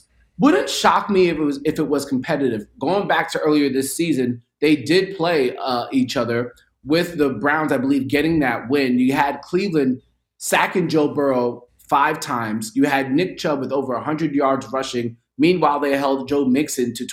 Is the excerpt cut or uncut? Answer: uncut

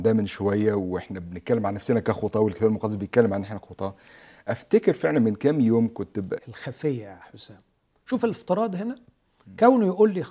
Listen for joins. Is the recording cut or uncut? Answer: cut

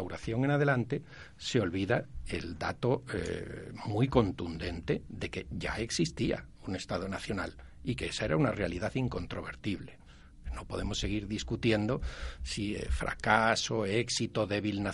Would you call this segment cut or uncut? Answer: uncut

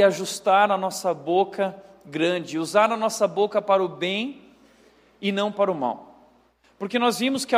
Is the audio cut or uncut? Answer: uncut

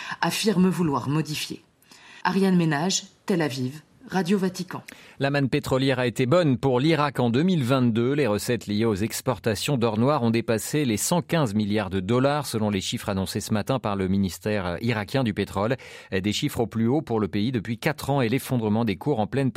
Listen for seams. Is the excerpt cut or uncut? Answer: uncut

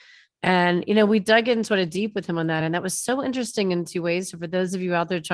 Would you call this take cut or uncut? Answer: uncut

